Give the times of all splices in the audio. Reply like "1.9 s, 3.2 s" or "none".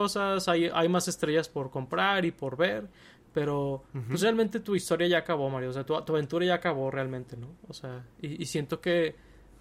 none